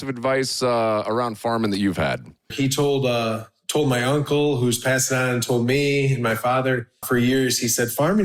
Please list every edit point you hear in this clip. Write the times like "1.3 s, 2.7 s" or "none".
2.5 s, 7.0 s